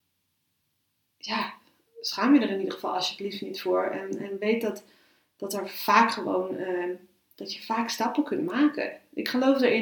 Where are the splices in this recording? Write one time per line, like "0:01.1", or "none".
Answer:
none